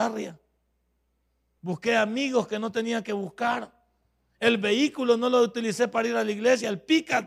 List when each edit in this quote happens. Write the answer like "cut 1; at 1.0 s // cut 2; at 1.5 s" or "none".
cut 1; at 1.6 s